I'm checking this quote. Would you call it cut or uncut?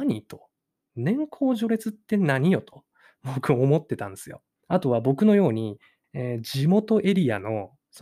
cut